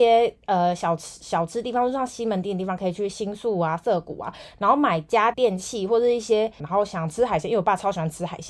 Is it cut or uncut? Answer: cut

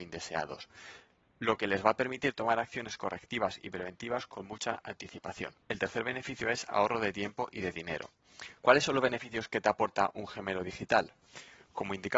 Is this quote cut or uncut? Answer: cut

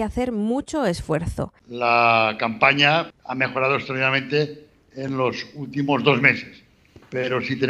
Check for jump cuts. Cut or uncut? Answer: cut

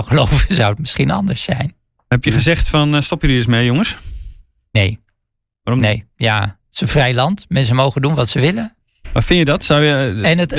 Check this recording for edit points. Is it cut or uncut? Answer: uncut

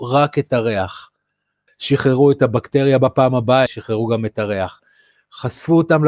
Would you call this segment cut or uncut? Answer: cut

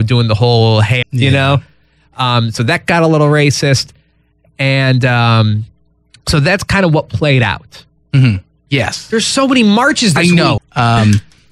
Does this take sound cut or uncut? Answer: cut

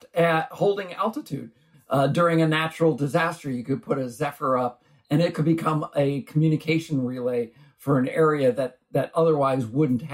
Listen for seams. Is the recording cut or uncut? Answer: cut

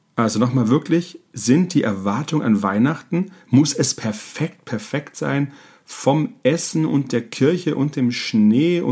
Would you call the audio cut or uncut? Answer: uncut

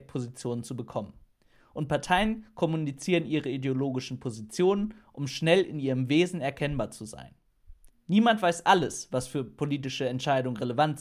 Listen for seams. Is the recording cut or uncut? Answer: cut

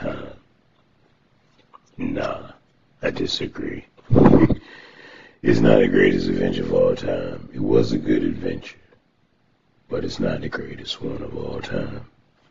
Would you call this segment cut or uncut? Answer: uncut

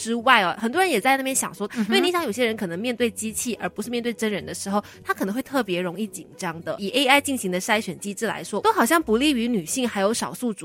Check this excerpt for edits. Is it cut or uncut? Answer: cut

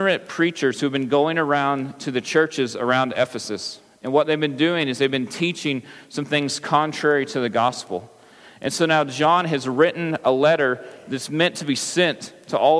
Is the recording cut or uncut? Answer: uncut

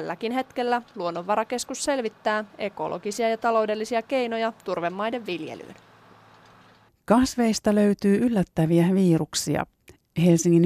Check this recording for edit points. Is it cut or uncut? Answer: cut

